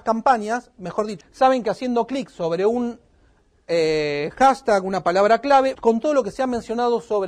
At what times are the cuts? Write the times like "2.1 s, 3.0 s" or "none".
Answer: 1.2 s, 5.8 s